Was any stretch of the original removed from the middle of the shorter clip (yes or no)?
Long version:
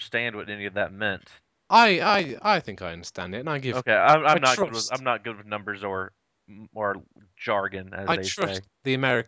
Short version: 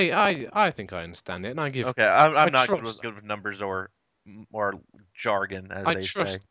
yes